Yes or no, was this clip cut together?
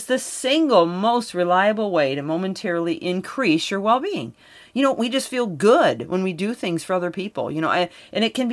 no